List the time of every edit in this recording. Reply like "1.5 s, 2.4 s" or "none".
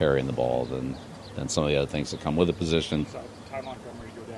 3.0 s